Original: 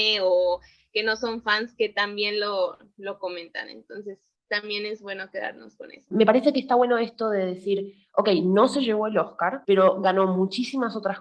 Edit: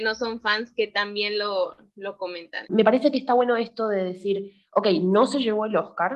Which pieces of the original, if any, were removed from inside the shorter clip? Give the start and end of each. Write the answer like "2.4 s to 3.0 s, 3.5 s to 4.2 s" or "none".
3.7 s to 6.1 s